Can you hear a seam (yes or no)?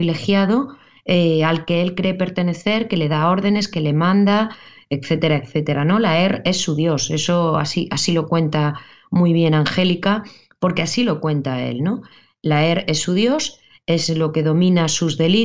no